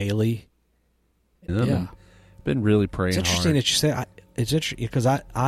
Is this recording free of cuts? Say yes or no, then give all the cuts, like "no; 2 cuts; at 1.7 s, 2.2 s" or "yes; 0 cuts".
no; 1 cut; at 1.5 s